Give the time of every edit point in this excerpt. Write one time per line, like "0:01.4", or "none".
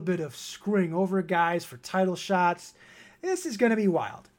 none